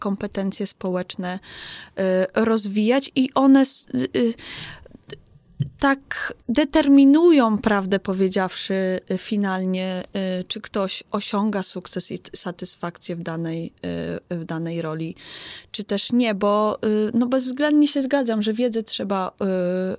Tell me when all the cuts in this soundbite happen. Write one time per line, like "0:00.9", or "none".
0:06.4